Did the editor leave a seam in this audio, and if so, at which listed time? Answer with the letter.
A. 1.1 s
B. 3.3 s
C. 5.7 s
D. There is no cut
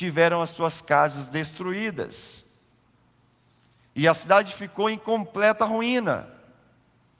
D